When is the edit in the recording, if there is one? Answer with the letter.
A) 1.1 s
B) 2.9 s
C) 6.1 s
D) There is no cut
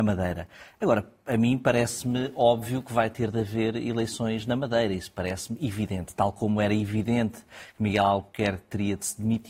D